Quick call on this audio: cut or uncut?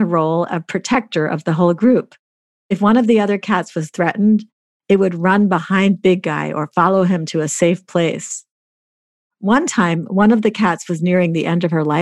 uncut